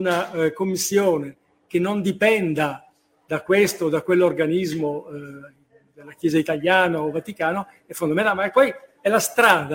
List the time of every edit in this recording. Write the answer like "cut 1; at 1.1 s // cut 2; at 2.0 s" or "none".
none

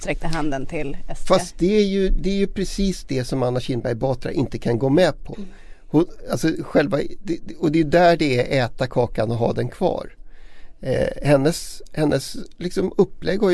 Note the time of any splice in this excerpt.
none

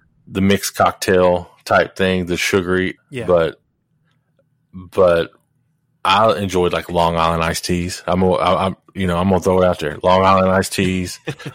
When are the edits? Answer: cut 1; at 3.0 s

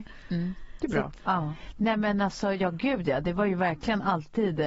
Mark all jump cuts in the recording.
cut 1; at 1.2 s

